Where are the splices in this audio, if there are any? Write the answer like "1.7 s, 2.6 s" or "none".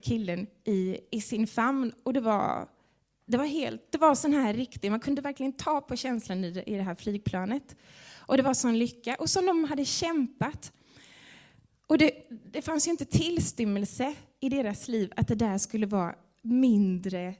none